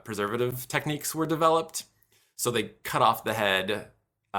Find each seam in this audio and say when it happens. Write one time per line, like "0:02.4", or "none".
none